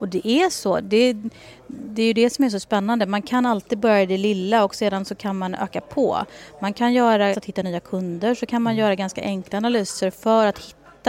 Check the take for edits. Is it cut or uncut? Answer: cut